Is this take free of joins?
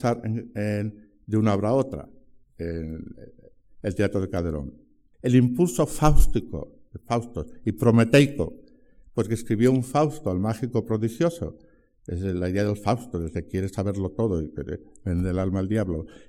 no; 1 cut; at 5.1 s

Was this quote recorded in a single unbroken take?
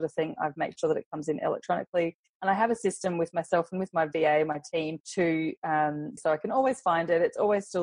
no; 2 cuts; at 5.0 s, 6.2 s

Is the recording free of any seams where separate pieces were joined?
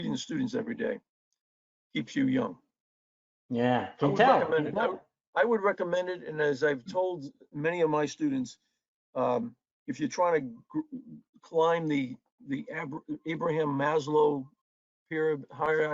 yes; 0 cuts

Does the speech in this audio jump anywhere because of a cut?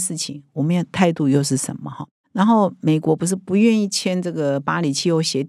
no; 0 cuts

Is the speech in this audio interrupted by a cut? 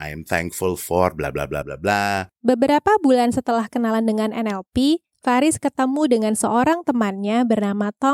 yes; 1 cut; at 1.6 s

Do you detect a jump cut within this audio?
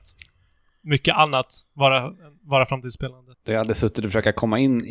yes; 1 cut; at 3.3 s

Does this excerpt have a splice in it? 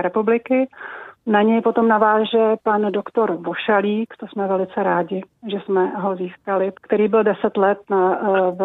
yes; 2 cuts; at 1.2 s, 6.7 s

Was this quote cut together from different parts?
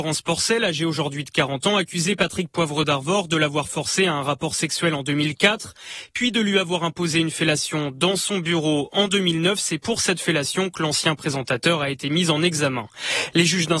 no; 0 cuts

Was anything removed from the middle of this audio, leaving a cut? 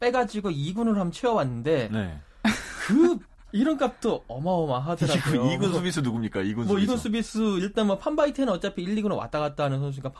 no; 0 cuts

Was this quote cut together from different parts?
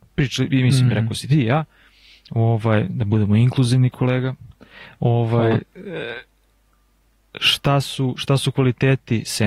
no; 0 cuts

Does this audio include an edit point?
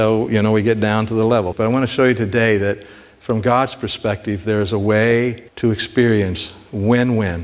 yes; 2 cuts; at 1.5 s, 5.5 s

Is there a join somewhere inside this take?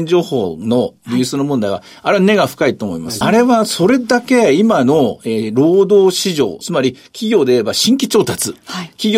yes; 2 cuts; at 3.2 s, 6.6 s

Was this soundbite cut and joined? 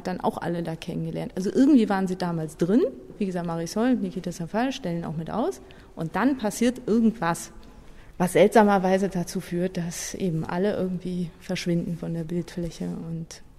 no; 0 cuts

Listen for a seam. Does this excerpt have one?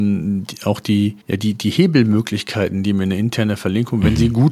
yes; 1 cut; at 1.2 s

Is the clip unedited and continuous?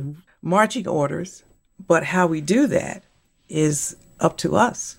yes; 0 cuts

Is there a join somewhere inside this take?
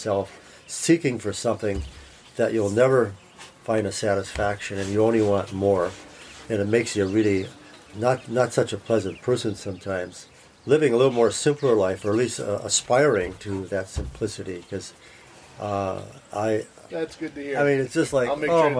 yes; 2 cuts; at 7.9 s, 16.9 s

